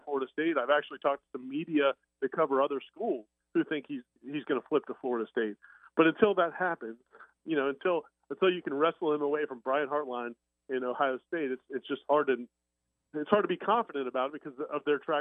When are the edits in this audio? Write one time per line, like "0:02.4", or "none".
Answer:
none